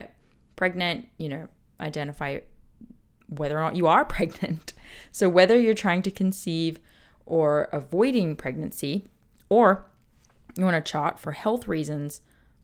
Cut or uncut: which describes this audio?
uncut